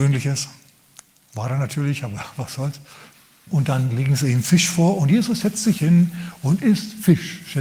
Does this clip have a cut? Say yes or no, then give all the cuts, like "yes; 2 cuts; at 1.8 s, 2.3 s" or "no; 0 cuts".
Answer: yes; 1 cut; at 3.5 s